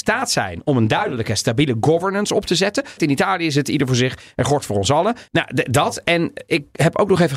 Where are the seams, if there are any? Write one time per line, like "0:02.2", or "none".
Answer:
0:03.0
0:05.3

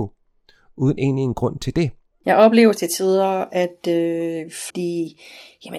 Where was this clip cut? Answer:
0:02.1
0:04.7

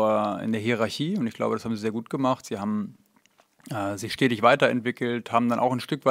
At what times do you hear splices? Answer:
none

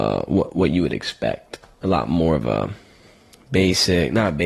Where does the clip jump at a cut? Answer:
none

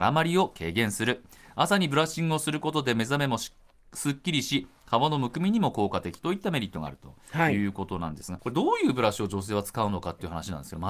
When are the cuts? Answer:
0:08.4

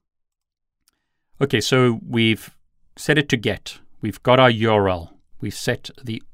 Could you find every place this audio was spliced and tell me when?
0:05.3

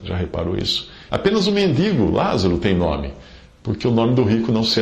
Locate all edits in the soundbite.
0:01.1

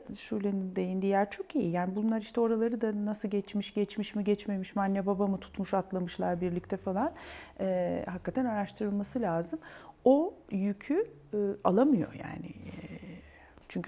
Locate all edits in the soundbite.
none

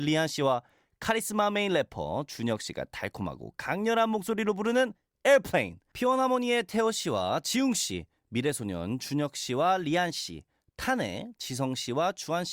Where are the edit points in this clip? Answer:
0:05.9

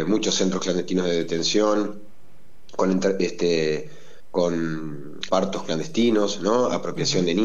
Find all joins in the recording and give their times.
0:05.3

